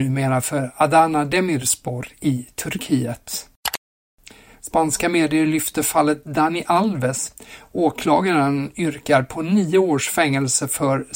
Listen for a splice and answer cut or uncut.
uncut